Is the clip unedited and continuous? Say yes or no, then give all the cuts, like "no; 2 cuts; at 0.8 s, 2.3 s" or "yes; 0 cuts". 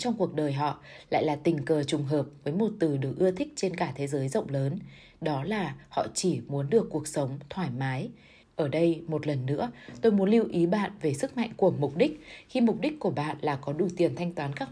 no; 1 cut; at 8.4 s